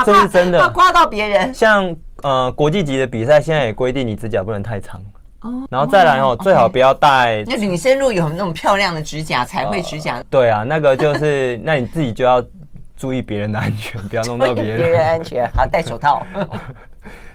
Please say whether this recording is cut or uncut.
cut